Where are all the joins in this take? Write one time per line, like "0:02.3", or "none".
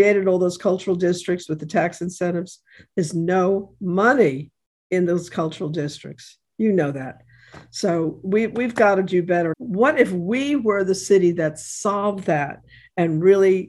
0:09.5